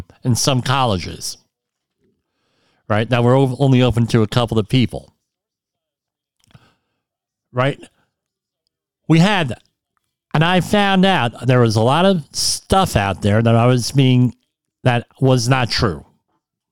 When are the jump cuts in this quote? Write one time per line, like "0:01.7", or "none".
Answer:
none